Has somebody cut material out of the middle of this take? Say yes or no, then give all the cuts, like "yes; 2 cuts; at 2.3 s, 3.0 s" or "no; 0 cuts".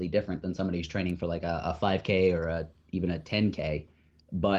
no; 0 cuts